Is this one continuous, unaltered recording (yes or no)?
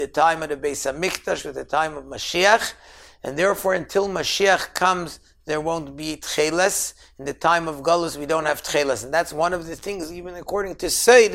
yes